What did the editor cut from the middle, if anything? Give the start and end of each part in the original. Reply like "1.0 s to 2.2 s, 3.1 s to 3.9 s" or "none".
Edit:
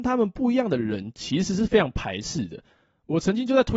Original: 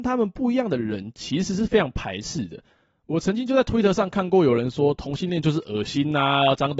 none